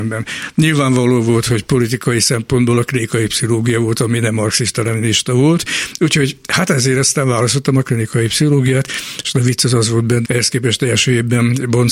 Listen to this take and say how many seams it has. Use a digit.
1